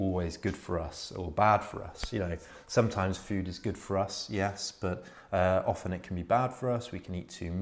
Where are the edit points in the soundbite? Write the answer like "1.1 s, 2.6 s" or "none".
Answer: none